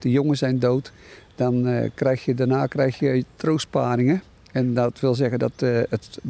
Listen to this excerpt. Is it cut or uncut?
uncut